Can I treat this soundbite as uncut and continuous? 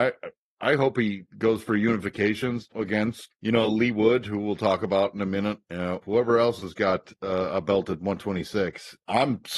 yes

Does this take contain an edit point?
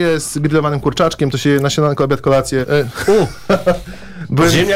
yes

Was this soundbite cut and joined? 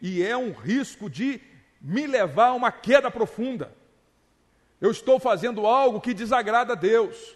no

